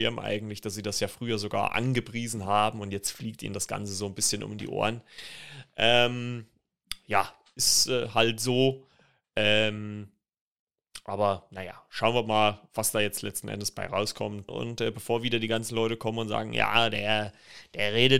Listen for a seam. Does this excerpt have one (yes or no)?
yes